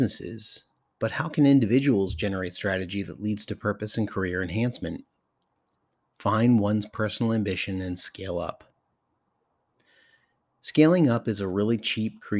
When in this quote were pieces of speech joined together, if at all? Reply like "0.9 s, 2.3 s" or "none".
none